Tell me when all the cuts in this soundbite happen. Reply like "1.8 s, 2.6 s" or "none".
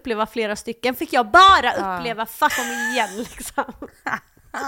2.5 s